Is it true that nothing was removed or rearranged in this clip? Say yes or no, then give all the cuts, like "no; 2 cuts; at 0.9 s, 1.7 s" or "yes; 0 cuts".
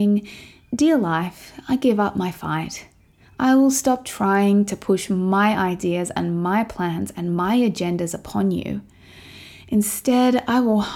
yes; 0 cuts